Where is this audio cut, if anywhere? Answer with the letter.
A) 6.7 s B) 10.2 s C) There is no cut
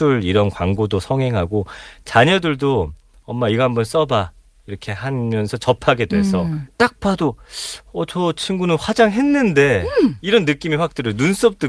A